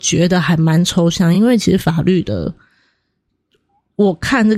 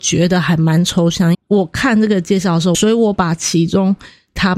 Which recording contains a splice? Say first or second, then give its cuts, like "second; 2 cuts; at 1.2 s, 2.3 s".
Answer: second; 2 cuts; at 1.3 s, 2.7 s